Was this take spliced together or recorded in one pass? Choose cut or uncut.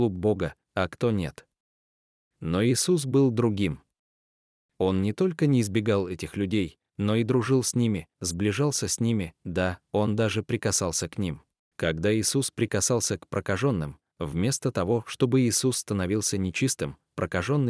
cut